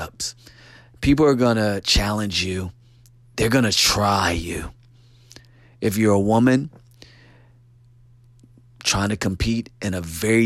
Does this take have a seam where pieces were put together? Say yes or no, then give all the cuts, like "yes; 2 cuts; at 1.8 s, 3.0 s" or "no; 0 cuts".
no; 0 cuts